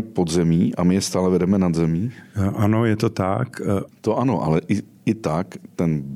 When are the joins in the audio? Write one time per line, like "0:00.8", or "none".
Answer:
0:03.9